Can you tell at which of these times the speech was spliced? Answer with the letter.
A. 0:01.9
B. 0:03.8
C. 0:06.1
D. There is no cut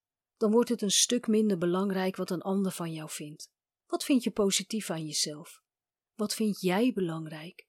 B